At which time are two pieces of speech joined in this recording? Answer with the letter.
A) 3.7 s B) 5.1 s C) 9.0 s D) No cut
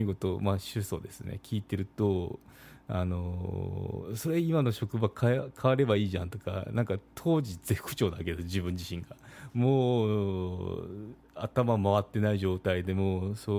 D